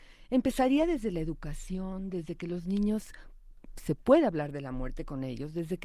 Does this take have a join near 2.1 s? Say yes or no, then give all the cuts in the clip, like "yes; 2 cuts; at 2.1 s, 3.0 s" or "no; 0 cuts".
no; 0 cuts